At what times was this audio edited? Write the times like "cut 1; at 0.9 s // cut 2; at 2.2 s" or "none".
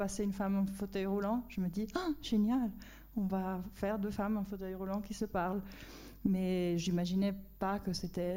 none